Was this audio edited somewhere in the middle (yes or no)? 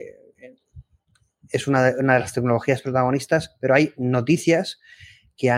no